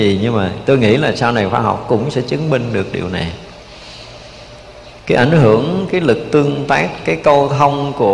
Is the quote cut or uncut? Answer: cut